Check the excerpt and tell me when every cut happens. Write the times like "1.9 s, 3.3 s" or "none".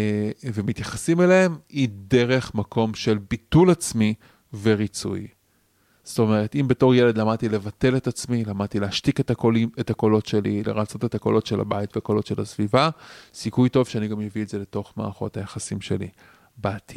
10.6 s